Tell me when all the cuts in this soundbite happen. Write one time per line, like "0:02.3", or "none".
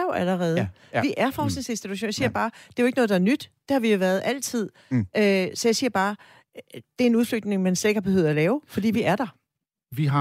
none